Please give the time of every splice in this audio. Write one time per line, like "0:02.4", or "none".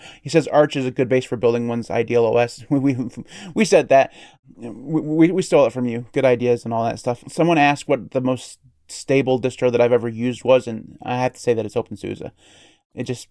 0:07.2